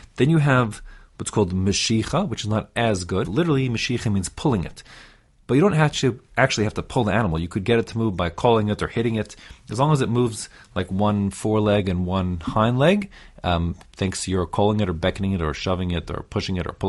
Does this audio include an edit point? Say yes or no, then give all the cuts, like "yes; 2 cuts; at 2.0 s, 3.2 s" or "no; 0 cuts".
yes; 1 cut; at 3.2 s